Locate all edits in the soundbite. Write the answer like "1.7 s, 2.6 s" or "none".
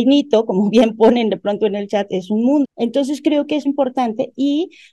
2.6 s, 3.7 s